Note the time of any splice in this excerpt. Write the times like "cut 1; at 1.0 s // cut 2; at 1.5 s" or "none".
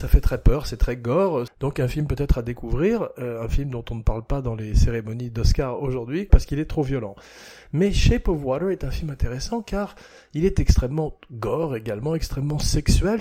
cut 1; at 1.5 s // cut 2; at 6.3 s